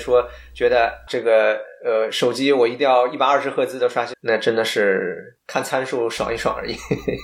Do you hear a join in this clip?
yes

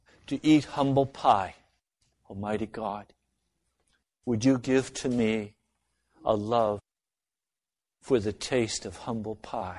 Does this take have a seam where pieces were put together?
yes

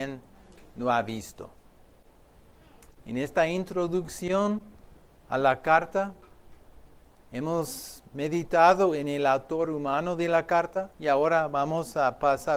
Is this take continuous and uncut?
no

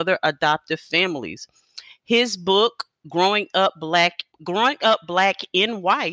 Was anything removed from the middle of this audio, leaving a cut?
yes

